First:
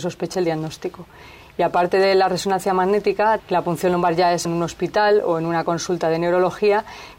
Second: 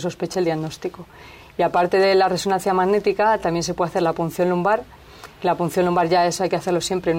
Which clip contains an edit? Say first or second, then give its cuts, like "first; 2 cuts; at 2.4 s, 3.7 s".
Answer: first; 2 cuts; at 3.4 s, 4.4 s